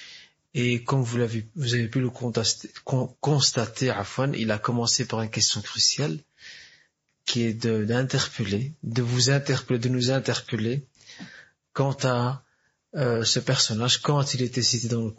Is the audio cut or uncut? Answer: uncut